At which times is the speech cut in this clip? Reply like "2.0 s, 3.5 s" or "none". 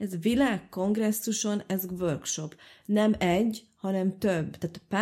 none

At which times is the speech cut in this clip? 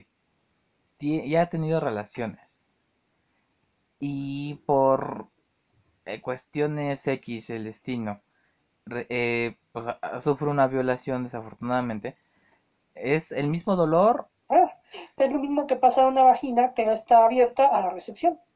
13.0 s, 14.4 s

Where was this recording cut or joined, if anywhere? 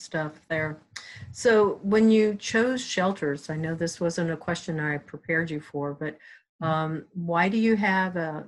none

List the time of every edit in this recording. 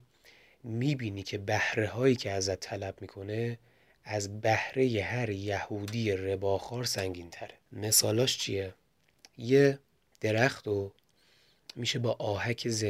7.6 s

